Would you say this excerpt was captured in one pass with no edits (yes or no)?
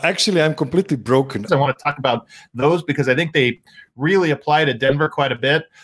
no